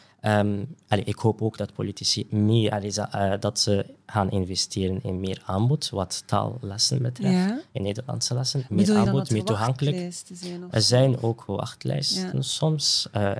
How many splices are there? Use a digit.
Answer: 0